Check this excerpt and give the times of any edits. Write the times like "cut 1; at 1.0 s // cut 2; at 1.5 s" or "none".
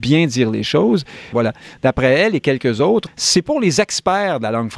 cut 1; at 1.3 s // cut 2; at 3.1 s